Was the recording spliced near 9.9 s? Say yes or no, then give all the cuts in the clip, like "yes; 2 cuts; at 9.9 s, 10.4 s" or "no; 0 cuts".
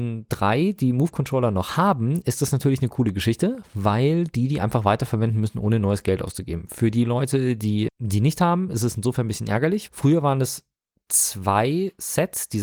yes; 2 cuts; at 7.9 s, 9.9 s